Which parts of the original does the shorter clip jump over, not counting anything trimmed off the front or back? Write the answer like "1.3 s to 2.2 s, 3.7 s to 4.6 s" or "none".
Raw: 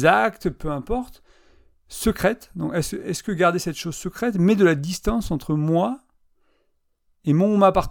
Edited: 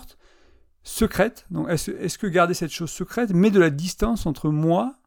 none